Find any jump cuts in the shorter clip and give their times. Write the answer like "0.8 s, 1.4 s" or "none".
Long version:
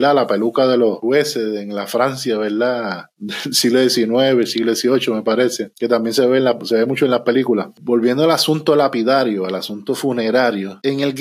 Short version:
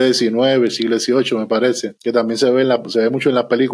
none